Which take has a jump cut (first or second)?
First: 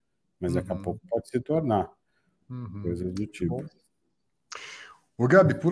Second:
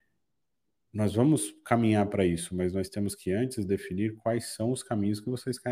first